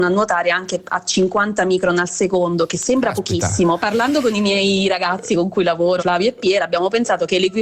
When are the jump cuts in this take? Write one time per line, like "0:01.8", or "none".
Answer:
0:03.8
0:06.0